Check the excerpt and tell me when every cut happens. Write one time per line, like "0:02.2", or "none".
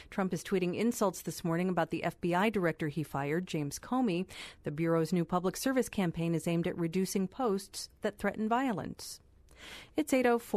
0:04.6